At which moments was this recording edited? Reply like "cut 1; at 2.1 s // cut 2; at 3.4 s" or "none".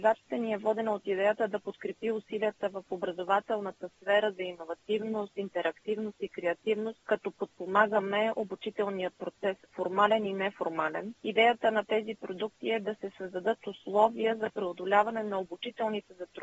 cut 1; at 11.2 s

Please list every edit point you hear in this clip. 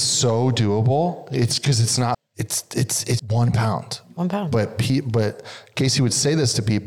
cut 1; at 2.1 s // cut 2; at 3.2 s

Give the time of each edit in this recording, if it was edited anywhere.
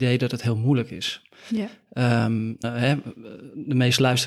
cut 1; at 2.6 s

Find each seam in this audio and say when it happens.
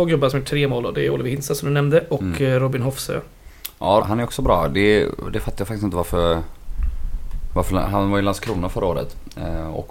cut 1; at 4.0 s

